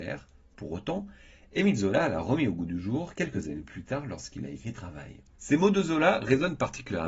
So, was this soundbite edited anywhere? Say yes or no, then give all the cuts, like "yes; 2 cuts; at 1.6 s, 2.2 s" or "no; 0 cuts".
yes; 1 cut; at 5.3 s